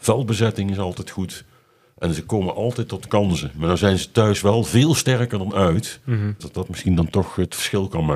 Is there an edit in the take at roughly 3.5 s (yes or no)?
no